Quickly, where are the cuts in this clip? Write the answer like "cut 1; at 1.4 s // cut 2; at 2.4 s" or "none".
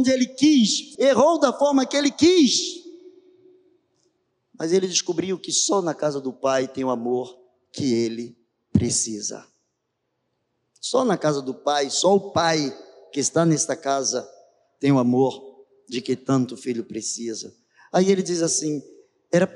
cut 1; at 1.0 s